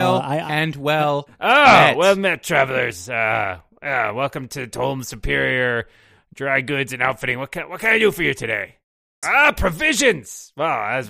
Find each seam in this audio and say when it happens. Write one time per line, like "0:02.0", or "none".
0:09.2